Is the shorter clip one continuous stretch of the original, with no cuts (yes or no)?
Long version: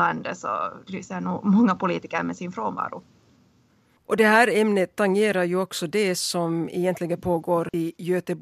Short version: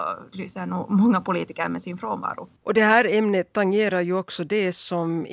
no